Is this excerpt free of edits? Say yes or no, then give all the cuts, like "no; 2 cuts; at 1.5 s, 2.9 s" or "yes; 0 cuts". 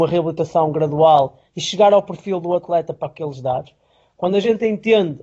yes; 0 cuts